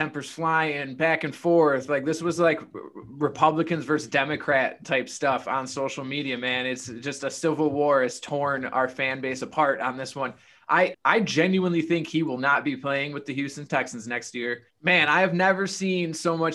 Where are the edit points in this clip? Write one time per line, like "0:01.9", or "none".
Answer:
0:10.9
0:14.7